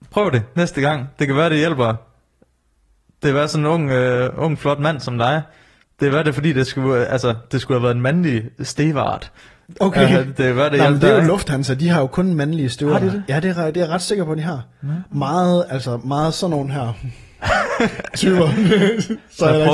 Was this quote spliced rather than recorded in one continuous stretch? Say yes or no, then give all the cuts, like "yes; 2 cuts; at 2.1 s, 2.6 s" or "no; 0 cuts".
no; 0 cuts